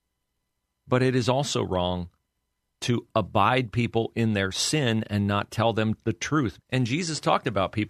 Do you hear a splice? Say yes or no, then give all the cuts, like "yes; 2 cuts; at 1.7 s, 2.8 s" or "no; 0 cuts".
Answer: yes; 1 cut; at 6.6 s